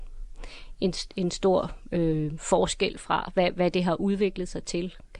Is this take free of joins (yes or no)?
yes